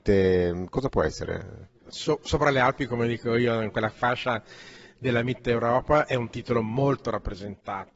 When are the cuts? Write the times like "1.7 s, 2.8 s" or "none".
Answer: 1.8 s